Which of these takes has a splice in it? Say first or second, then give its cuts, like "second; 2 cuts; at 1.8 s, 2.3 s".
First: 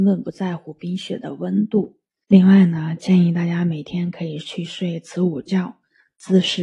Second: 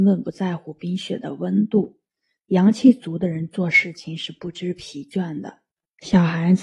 first; 1 cut; at 2.2 s